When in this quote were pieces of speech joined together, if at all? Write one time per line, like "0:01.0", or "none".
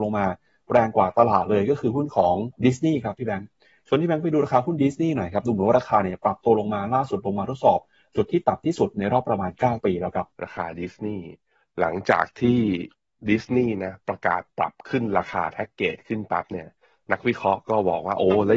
0:02.6
0:10.3